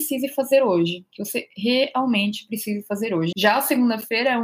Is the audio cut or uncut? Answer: cut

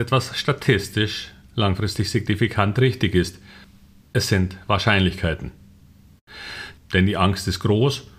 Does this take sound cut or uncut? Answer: cut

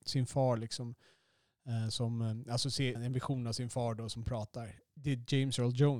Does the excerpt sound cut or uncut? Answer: cut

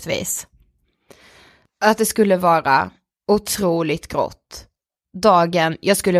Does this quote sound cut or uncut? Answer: uncut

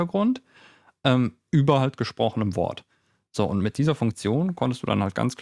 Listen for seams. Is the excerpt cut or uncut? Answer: uncut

